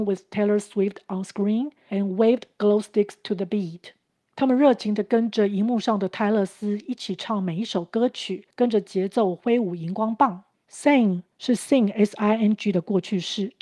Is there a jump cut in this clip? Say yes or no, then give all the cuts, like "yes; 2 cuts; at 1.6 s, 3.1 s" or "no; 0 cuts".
no; 0 cuts